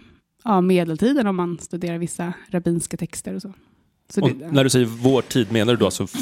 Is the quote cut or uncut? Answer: uncut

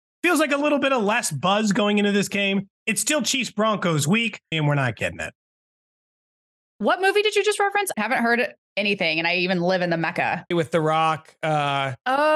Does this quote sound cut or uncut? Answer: cut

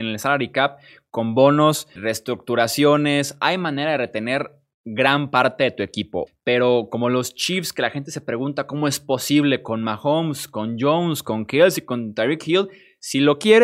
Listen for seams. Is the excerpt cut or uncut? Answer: cut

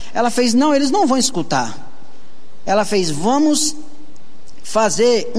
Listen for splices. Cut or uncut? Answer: cut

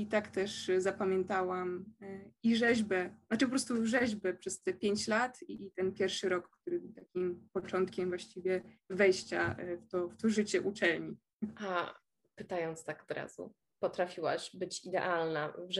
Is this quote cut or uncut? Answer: uncut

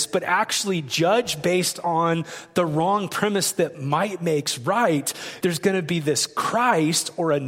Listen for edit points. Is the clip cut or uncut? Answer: cut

